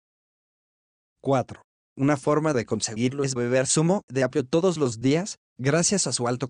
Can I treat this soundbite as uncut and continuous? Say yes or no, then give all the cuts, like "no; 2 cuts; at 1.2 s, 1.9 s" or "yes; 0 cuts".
no; 1 cut; at 1.7 s